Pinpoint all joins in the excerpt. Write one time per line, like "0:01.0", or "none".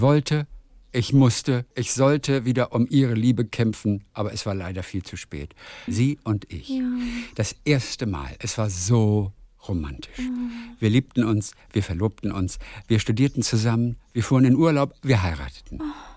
0:01.7
0:05.9